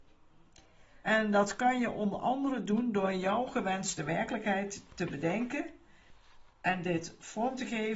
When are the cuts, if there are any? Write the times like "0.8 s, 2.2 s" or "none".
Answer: 1.0 s